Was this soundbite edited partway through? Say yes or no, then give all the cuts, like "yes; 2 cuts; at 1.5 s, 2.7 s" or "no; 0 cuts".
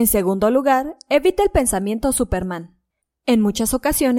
no; 0 cuts